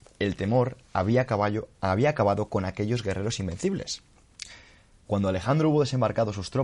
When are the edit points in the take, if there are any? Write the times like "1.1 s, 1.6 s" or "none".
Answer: 5.1 s